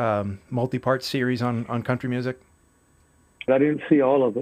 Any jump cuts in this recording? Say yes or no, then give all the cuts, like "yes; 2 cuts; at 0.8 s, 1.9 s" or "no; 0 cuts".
yes; 1 cut; at 3.5 s